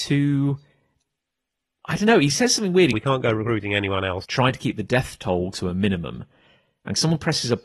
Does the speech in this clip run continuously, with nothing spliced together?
no; 2 cuts; at 2.9 s, 4.2 s

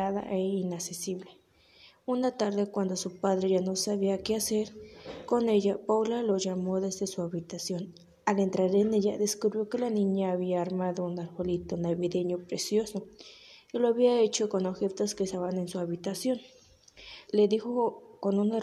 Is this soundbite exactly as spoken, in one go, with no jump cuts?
no; 1 cut; at 17.3 s

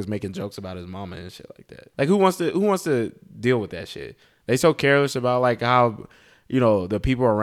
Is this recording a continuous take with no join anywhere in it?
no; 1 cut; at 1.9 s

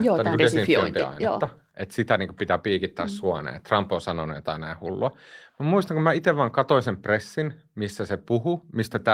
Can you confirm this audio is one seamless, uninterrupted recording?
yes; 0 cuts

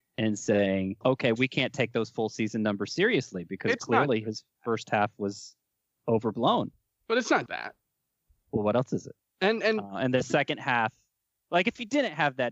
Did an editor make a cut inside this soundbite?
yes; 3 cuts; at 1.0 s, 7.5 s, 9.3 s

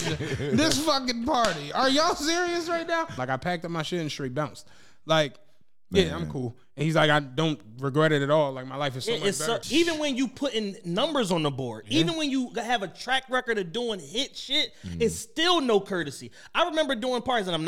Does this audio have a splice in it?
yes; 2 cuts; at 3.2 s, 9.6 s

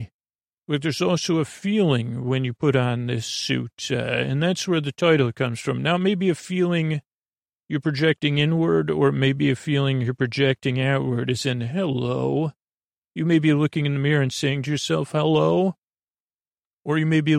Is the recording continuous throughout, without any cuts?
yes; 0 cuts

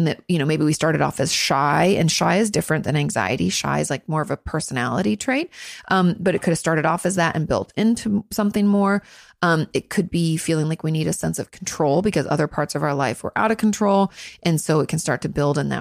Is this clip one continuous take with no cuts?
yes; 0 cuts

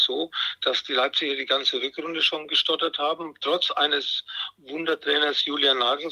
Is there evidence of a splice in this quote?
no; 0 cuts

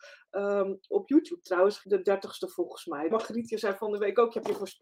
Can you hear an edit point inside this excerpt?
yes; 2 cuts; at 1.8 s, 3.1 s

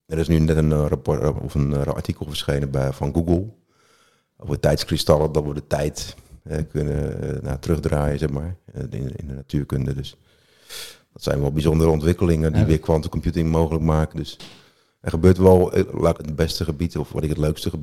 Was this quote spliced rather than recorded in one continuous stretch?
yes; 2 cuts; at 14.1 s, 16.2 s

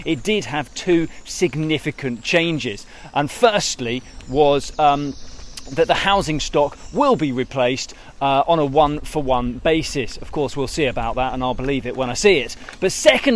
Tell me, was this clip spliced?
no; 0 cuts

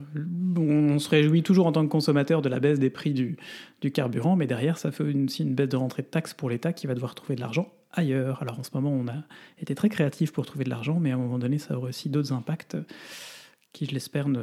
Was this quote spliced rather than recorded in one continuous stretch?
no; 0 cuts

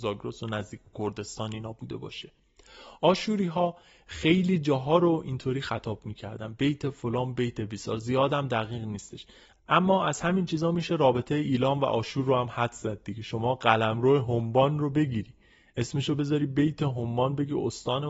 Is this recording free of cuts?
yes; 0 cuts

